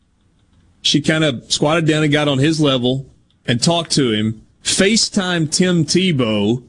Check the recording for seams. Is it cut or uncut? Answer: cut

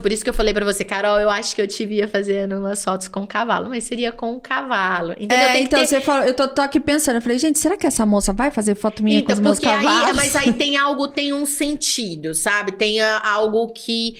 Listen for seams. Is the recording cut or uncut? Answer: uncut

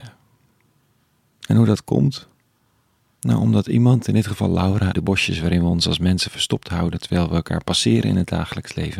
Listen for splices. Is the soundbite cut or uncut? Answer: cut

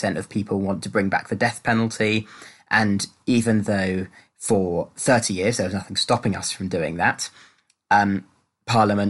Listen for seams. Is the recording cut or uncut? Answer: uncut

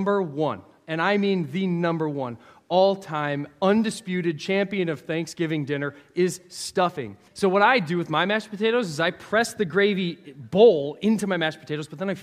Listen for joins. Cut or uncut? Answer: cut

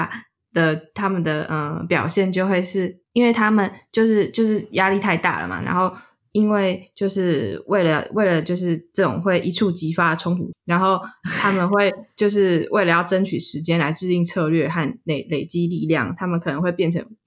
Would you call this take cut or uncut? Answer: cut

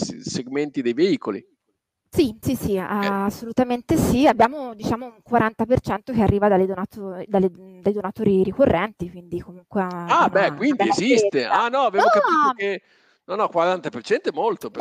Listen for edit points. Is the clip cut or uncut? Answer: cut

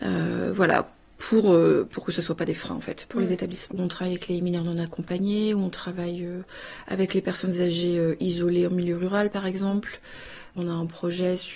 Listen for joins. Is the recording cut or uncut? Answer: uncut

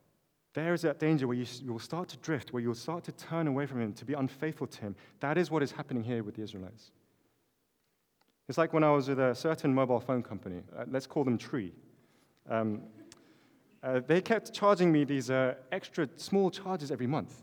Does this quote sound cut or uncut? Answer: cut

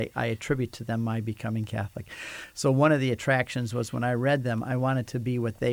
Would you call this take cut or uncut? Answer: uncut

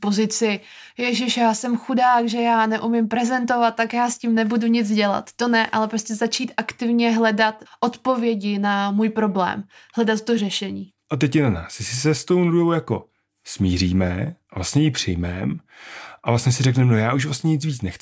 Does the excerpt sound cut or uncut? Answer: cut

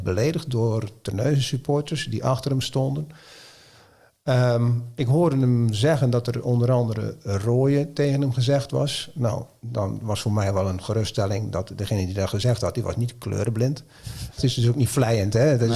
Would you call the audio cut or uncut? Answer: cut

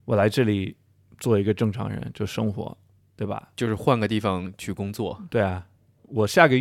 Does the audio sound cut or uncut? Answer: uncut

